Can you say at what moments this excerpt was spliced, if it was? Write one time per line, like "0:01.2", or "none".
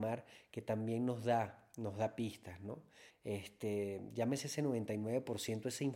0:03.1

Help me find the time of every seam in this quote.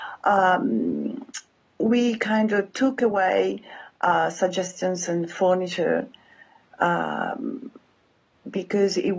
none

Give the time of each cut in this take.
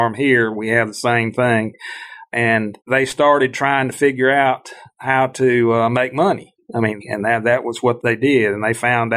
0:02.8
0:07.0
0:08.0

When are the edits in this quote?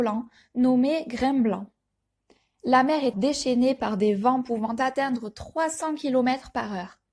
0:03.1

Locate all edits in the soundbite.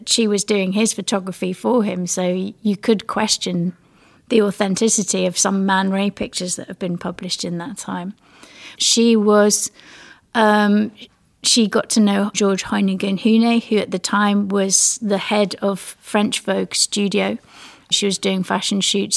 0:08.8
0:12.3
0:17.9

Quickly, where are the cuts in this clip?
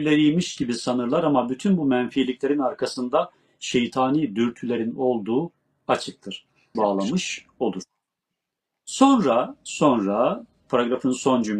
0:06.7

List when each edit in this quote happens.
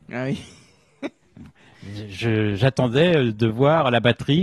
none

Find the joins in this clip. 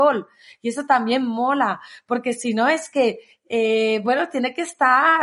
none

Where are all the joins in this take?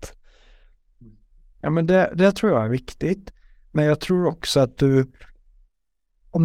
none

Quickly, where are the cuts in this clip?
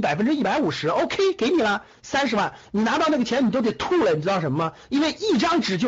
none

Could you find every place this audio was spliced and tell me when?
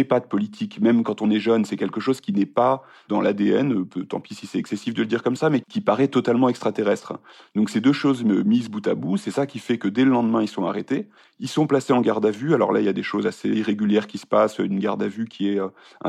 0:05.6

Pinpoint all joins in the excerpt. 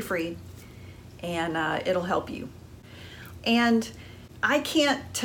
0:03.4

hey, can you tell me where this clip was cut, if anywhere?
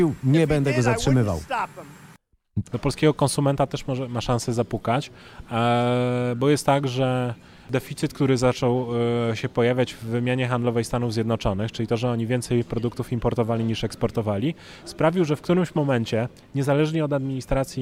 0:02.6

